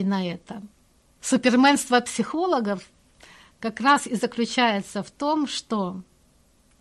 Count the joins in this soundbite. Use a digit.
1